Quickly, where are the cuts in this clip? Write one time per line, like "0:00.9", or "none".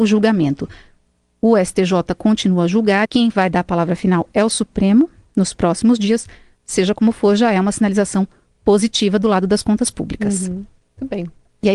0:03.1

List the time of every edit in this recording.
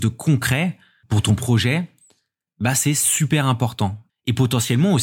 0:04.1

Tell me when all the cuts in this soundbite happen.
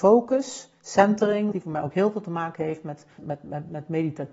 0:01.5
0:03.2

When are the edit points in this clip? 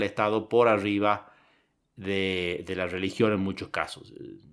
none

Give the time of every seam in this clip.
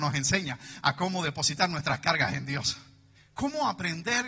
0:03.1

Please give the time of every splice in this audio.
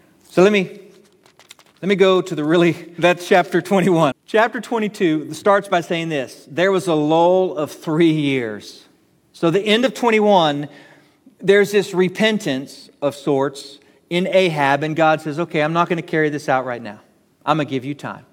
0:03.0
0:04.1

